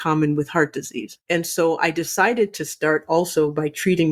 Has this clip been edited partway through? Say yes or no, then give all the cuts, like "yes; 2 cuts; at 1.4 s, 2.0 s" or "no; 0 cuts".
yes; 1 cut; at 1.2 s